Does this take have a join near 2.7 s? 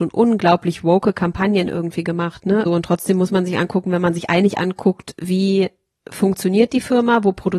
yes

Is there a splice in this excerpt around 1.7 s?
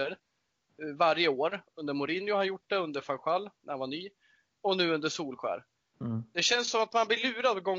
no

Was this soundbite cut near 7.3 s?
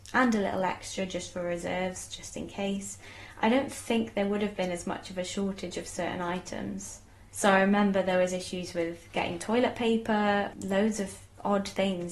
yes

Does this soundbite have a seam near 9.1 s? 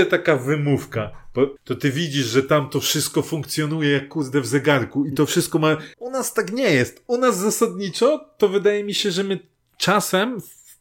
no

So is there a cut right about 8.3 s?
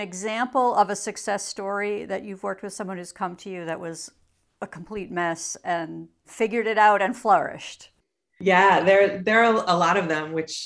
no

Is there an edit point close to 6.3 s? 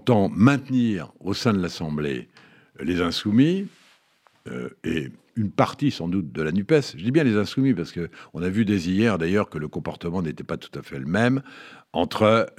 yes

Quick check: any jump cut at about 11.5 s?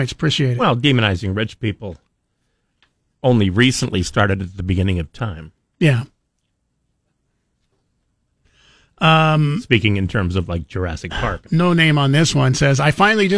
yes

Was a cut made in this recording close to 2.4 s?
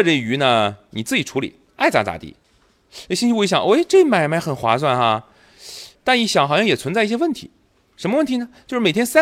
yes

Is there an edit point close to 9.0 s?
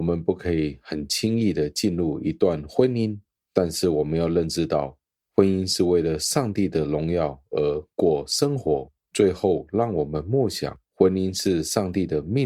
yes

